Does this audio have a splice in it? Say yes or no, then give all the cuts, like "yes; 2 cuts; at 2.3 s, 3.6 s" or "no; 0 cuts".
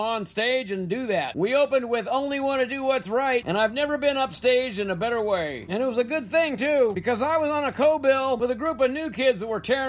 no; 0 cuts